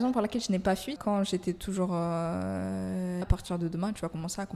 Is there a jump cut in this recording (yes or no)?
yes